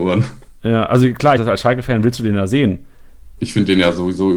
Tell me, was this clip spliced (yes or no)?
yes